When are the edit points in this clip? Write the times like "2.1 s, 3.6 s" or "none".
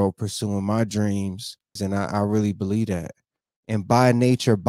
1.8 s, 3.5 s

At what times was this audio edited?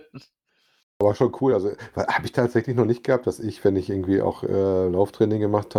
none

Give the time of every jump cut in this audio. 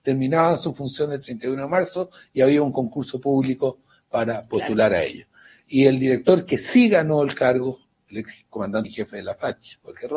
none

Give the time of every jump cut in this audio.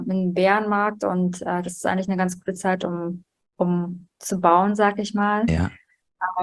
none

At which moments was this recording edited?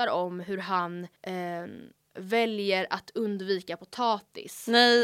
1.2 s

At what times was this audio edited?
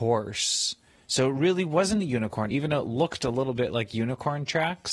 none

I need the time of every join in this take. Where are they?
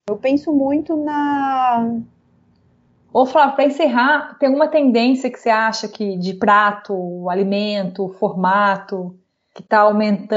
3.1 s

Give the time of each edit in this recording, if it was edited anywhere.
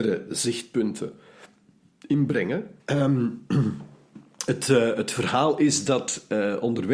2.8 s

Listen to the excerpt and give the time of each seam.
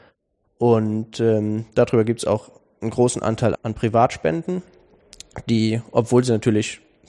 3.5 s

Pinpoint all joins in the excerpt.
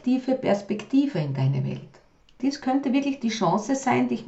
2.2 s

